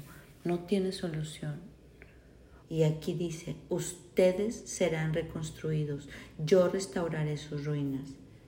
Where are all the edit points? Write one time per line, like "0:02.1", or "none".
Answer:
0:02.6

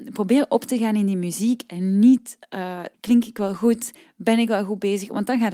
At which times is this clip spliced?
0:02.9

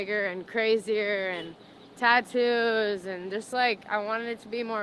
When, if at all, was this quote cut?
none

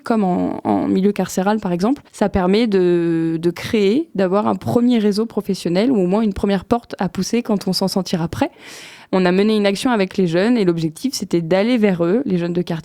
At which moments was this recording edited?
0:02.1
0:09.1

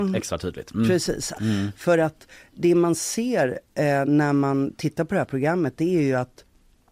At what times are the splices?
0:01.3

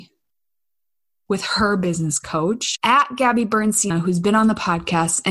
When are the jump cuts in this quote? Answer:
0:02.8
0:03.9

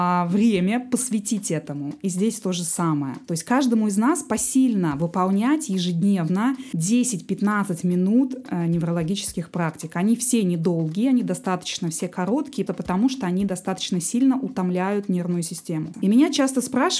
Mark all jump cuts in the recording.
0:12.7
0:15.9

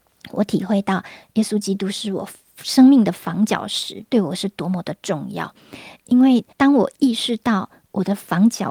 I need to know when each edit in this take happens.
0:06.5

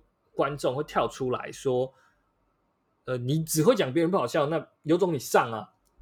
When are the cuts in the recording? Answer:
0:04.8

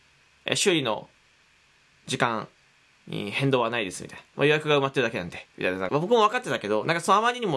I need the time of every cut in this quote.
0:05.9

